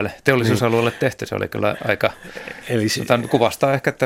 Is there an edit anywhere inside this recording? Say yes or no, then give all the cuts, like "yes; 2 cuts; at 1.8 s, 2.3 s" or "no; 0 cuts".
no; 0 cuts